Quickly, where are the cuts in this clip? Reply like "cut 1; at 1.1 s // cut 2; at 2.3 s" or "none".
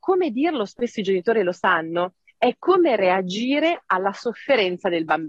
none